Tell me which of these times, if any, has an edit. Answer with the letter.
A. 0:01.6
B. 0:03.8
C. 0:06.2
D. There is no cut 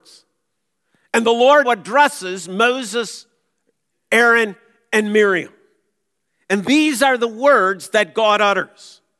A